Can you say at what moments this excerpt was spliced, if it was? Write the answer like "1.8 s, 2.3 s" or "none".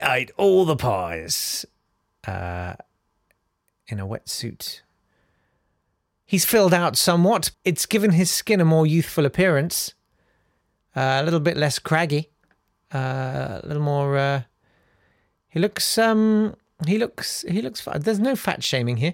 7.5 s, 17.4 s